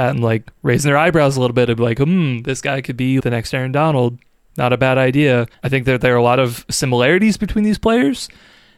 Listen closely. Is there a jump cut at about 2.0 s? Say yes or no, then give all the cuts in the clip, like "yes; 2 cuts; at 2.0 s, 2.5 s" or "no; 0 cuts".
no; 2 cuts; at 3.2 s, 5.5 s